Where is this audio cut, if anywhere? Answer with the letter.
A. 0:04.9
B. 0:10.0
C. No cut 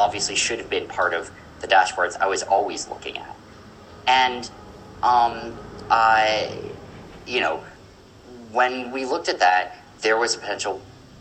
B